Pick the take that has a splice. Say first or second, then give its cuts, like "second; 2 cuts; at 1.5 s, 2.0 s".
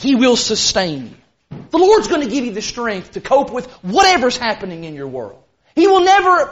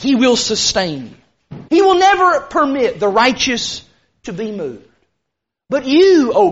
second; 1 cut; at 1.7 s